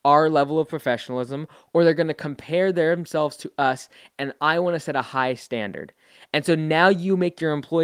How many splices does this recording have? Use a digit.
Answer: 0